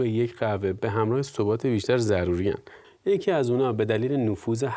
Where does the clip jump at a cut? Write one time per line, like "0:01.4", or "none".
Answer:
0:02.8